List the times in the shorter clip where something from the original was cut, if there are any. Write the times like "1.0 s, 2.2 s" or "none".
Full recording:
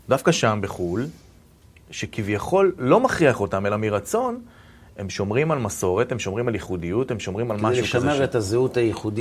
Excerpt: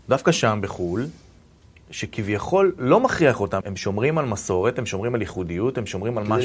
3.6 s